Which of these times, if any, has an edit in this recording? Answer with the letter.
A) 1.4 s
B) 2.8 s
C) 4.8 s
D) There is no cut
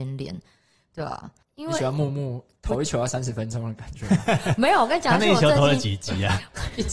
A